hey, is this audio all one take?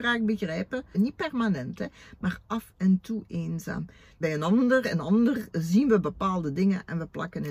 no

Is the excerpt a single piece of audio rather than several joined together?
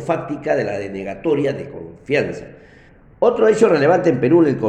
yes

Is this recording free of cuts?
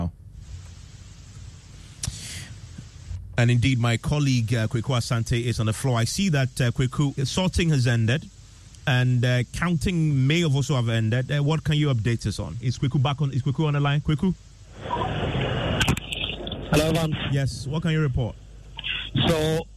no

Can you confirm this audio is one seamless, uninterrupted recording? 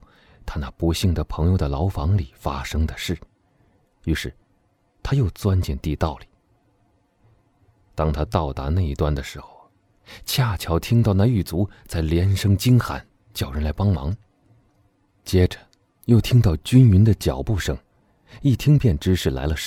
no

